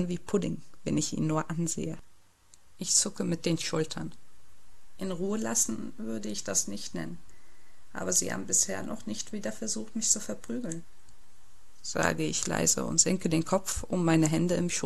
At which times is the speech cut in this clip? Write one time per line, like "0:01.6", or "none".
none